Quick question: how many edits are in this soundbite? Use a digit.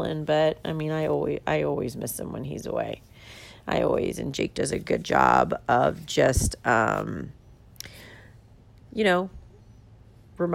0